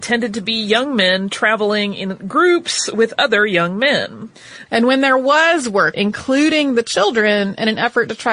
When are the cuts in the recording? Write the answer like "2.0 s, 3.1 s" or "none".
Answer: 4.7 s, 5.9 s